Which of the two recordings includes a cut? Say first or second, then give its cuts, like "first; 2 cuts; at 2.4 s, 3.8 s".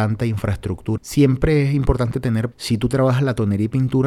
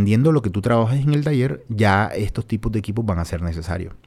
first; 2 cuts; at 1.0 s, 2.5 s